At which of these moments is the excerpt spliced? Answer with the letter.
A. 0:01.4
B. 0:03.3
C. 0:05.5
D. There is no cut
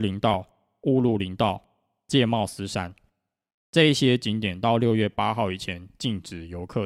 D